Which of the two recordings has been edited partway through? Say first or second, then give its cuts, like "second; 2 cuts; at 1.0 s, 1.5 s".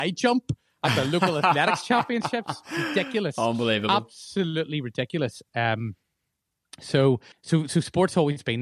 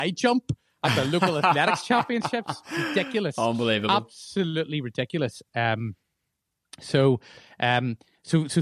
first; 1 cut; at 7.3 s